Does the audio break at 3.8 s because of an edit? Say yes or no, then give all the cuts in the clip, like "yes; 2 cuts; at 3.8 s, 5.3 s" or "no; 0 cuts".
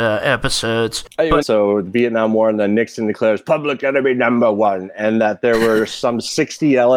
no; 1 cut; at 1.4 s